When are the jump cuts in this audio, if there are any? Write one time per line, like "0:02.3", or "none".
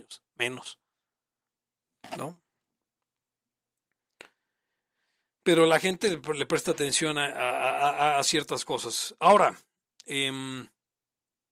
none